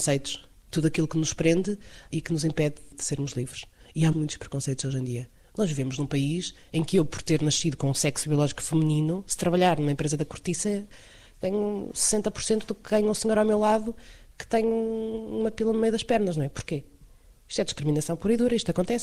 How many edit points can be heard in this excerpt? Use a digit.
1